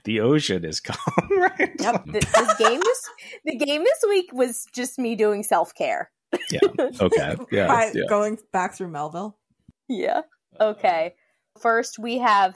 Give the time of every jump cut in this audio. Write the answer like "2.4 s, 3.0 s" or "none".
2.0 s, 11.6 s